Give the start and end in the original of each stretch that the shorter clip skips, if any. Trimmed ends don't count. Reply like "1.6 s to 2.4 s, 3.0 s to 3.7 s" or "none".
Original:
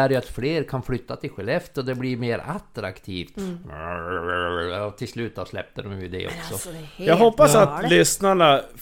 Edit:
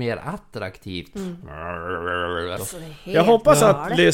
4.8 s to 6.5 s